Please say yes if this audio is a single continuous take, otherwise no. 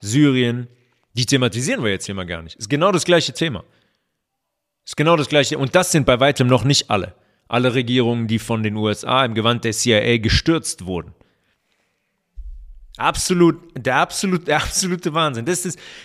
yes